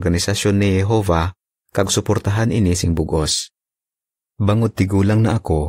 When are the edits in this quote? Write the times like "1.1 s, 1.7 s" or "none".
4.2 s